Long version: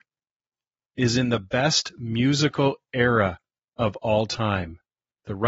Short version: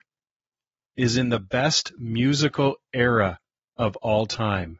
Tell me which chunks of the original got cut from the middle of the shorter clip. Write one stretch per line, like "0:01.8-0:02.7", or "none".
none